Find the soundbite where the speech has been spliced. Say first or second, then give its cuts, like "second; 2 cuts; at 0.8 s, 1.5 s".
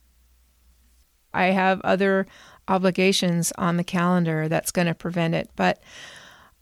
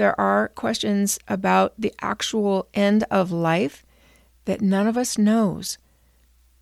first; 1 cut; at 1.3 s